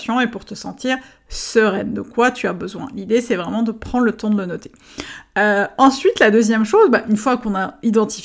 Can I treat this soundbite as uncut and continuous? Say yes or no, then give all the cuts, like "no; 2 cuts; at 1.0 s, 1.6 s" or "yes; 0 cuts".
yes; 0 cuts